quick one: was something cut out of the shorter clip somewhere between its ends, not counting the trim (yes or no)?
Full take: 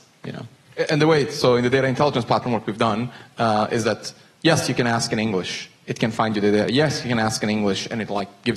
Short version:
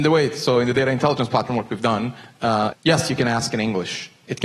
yes